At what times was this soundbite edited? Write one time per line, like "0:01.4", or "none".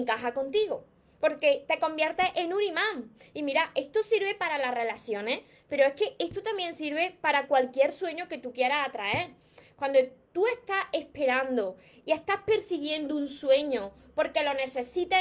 none